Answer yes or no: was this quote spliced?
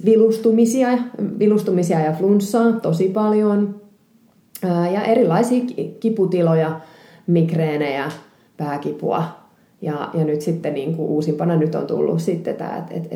no